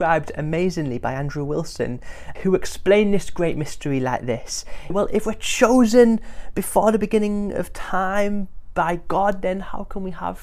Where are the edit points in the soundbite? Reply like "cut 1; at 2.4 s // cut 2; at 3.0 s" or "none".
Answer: cut 1; at 2.3 s // cut 2; at 4.9 s